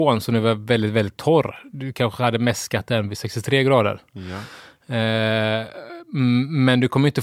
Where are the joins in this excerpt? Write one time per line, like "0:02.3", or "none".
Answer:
none